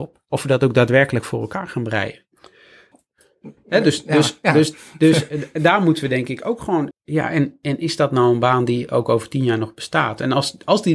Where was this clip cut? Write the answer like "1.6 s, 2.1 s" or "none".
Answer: 2.9 s, 6.9 s